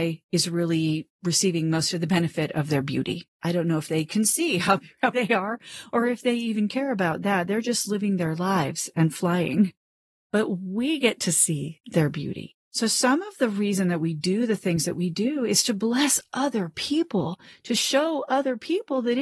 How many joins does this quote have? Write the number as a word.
two